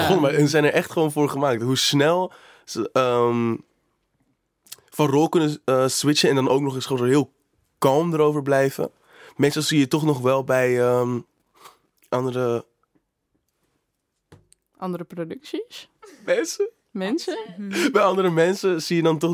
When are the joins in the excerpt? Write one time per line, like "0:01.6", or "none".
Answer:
none